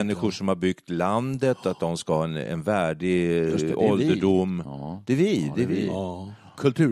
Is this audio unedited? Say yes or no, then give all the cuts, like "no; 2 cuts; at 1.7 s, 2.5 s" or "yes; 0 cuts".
yes; 0 cuts